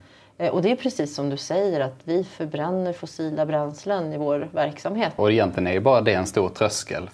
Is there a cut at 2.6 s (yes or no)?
no